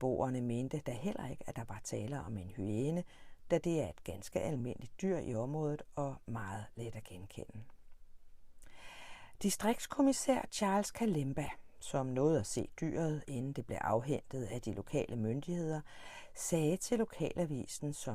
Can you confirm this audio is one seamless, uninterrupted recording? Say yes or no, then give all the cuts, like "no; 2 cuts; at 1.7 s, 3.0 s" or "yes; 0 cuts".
yes; 0 cuts